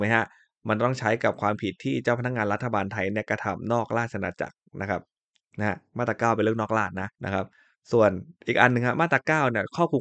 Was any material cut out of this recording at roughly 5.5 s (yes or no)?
no